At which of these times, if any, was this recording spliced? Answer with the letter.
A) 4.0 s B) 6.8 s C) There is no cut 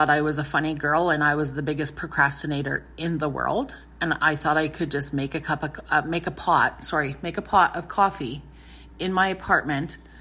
C